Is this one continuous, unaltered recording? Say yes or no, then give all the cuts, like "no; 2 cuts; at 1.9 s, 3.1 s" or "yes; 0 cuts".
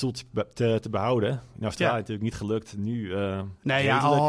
yes; 0 cuts